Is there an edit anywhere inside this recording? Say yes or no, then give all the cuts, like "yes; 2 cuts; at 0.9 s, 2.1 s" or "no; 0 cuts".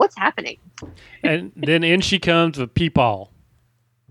no; 0 cuts